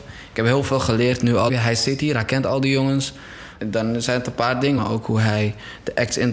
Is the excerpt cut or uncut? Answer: cut